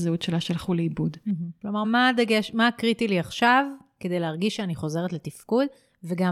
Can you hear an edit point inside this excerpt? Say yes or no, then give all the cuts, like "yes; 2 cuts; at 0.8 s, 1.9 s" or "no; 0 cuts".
yes; 1 cut; at 1.8 s